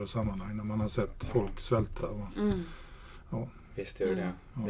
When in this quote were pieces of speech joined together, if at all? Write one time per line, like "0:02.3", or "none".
none